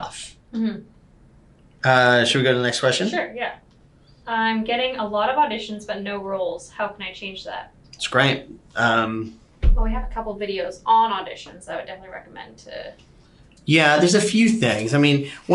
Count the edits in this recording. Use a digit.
1